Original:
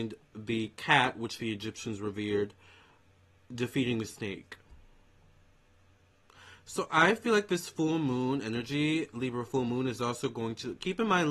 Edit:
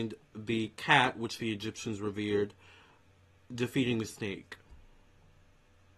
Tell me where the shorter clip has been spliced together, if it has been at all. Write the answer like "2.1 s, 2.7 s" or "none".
none